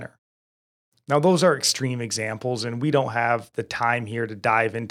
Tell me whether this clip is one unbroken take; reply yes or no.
yes